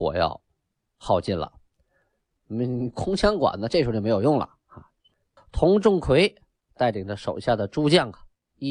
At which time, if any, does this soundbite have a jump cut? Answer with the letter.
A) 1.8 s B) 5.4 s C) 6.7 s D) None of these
B